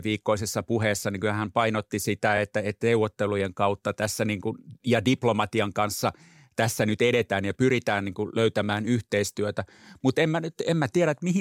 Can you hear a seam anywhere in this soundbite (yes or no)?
no